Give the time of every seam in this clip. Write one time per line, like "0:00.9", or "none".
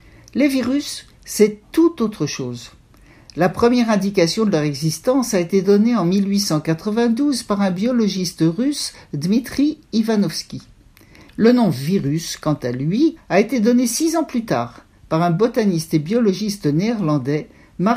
0:11.3
0:13.2